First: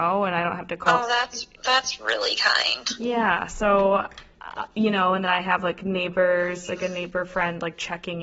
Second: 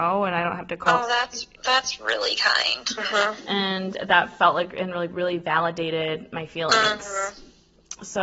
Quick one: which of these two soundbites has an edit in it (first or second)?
second